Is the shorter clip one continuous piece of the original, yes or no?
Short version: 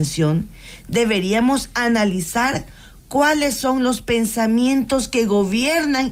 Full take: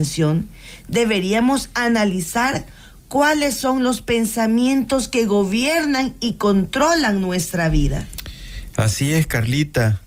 yes